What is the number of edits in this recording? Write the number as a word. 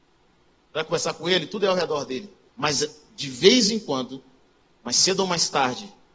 two